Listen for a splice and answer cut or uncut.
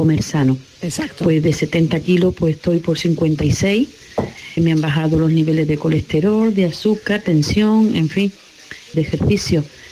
cut